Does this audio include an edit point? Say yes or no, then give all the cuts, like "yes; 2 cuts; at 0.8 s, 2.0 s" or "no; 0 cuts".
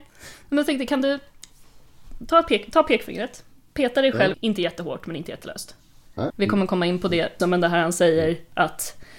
yes; 3 cuts; at 4.3 s, 6.3 s, 7.4 s